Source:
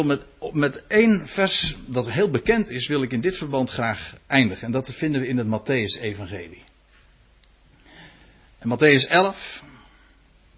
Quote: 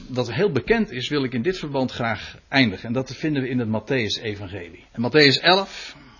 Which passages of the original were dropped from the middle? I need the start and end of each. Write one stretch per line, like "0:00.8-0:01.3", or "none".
0:06.7-0:08.5

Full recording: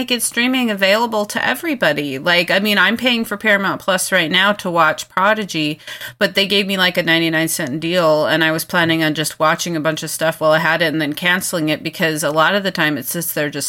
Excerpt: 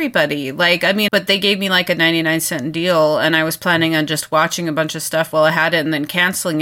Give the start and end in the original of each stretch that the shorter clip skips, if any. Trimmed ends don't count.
0:02.7-0:06.2

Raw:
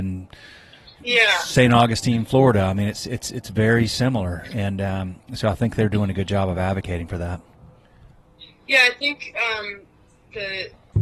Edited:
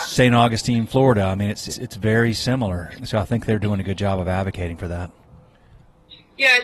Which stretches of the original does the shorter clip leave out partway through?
0:03.1-0:03.2
0:04.5-0:05.3

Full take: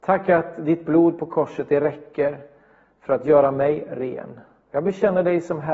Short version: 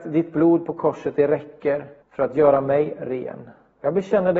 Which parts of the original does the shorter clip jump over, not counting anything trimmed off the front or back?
0:02.5-0:02.9

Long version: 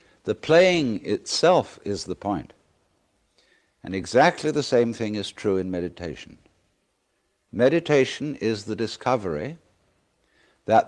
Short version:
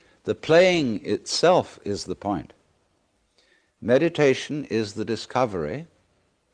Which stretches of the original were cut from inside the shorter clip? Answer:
0:03.7-0:07.4

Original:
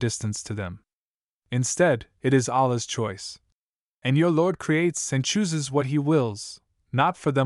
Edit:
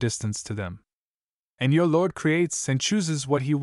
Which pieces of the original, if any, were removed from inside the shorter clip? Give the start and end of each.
0:01.4-0:03.8

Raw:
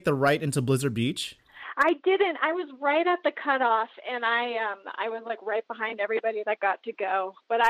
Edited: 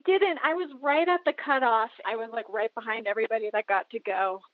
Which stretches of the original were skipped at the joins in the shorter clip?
0:04.0-0:05.0

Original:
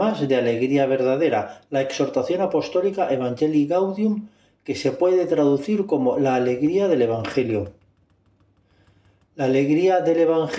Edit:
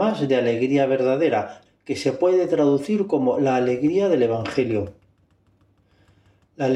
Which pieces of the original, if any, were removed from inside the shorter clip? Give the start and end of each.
0:01.7-0:04.4

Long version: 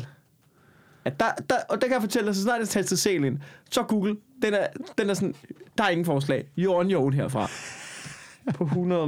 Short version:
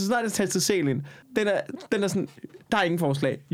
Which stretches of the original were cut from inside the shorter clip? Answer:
0:03.6-0:04.3

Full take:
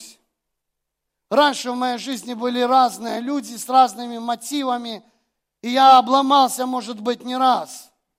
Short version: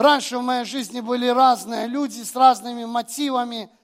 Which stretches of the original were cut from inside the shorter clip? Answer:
none

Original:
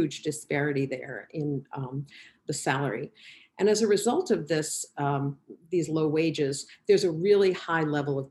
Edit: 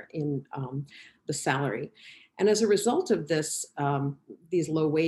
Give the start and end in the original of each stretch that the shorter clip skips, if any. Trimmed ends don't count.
none

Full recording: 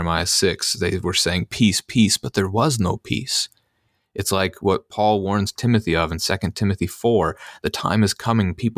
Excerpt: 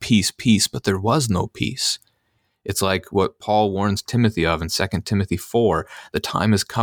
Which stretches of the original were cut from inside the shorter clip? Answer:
none

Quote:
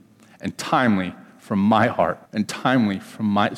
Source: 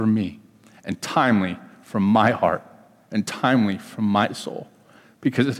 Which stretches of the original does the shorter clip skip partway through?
0:02.7-0:03.0

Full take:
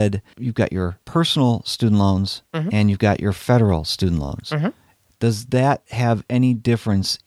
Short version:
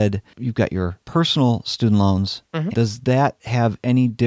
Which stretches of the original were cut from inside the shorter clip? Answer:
0:02.7-0:05.2

